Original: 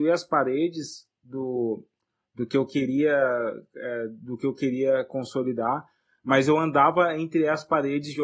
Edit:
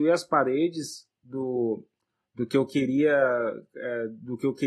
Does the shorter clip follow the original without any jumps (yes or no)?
yes